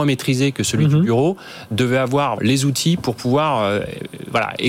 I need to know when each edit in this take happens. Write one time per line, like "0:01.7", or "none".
0:02.4